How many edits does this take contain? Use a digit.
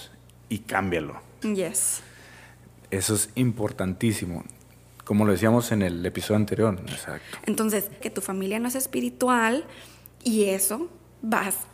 3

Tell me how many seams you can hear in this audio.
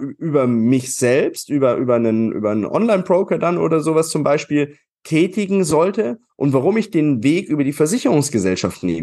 0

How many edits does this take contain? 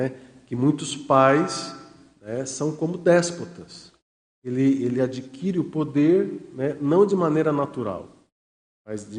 0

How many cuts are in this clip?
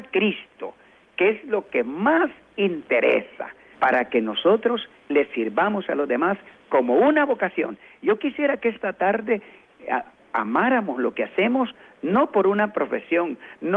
1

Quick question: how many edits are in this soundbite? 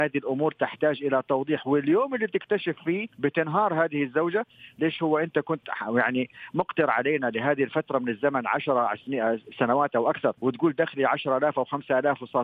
2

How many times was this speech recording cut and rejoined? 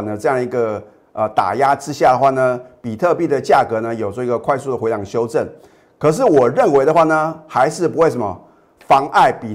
0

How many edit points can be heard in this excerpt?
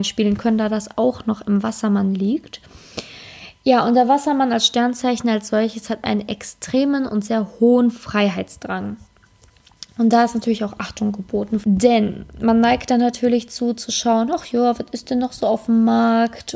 1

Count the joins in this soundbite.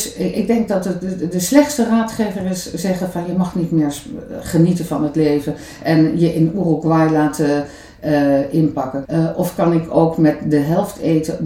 1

